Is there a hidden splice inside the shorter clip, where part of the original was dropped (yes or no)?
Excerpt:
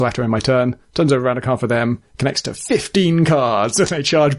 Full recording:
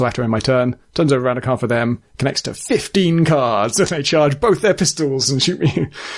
no